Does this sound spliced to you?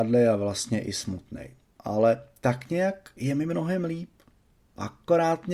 no; 0 cuts

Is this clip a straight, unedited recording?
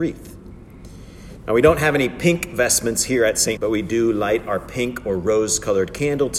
no; 1 cut; at 3.6 s

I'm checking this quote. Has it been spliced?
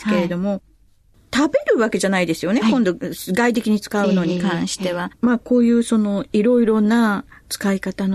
yes; 1 cut; at 5.1 s

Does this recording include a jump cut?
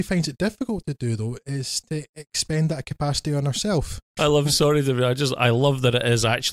yes; 1 cut; at 4.2 s

